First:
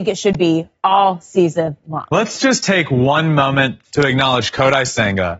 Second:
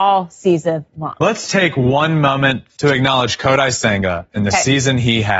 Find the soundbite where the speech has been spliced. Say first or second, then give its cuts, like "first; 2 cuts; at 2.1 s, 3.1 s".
second; 1 cut; at 1.5 s